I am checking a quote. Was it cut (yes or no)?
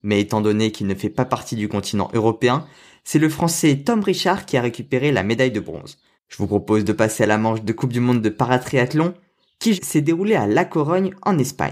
yes